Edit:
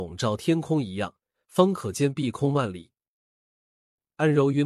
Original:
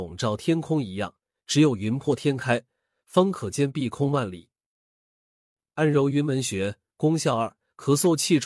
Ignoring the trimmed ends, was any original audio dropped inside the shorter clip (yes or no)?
yes